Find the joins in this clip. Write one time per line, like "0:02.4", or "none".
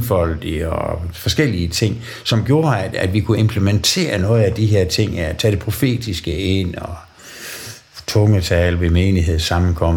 none